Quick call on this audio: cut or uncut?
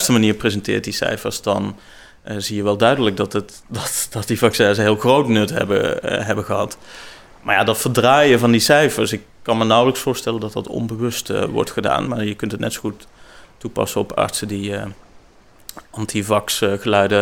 cut